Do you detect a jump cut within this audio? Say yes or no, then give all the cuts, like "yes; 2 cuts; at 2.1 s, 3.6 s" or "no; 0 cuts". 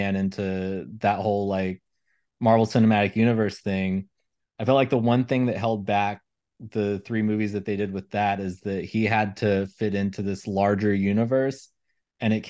no; 0 cuts